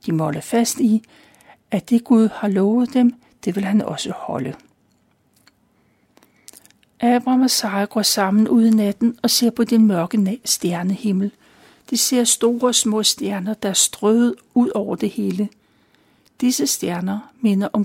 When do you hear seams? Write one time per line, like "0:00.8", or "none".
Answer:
none

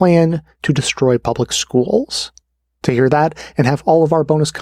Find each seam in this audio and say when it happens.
none

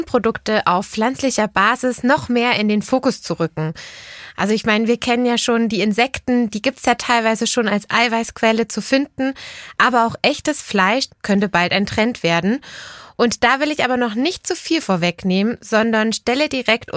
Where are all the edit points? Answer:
0:11.1

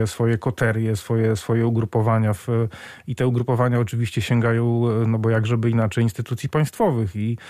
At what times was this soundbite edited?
none

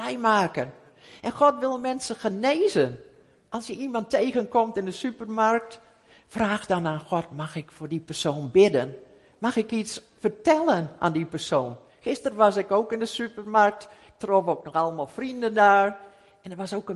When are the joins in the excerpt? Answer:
none

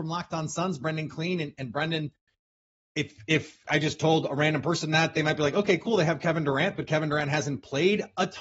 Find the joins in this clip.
none

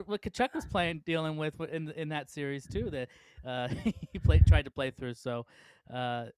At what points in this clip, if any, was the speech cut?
none

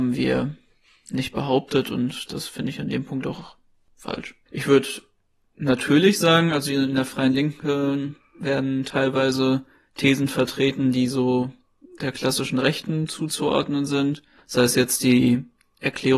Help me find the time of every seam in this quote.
0:04.5

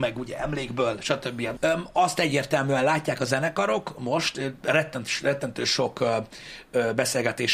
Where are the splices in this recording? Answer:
0:01.6

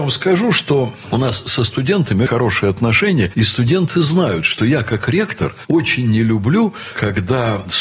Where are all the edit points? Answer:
0:02.3

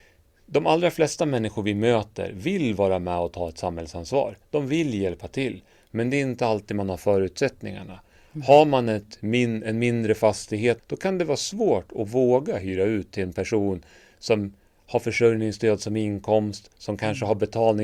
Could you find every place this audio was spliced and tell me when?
0:10.8

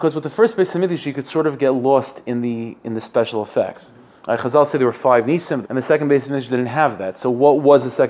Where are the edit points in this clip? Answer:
0:05.6

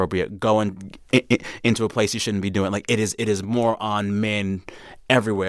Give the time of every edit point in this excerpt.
none

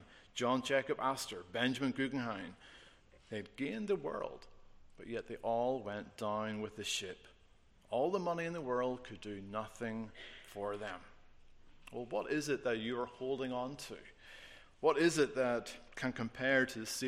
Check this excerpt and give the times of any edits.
none

